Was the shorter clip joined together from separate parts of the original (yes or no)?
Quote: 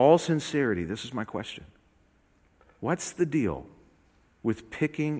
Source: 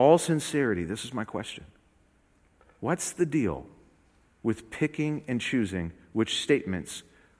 no